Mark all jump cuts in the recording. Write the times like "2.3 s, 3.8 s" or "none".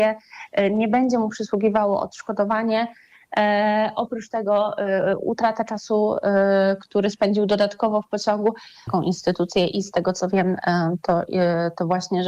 8.9 s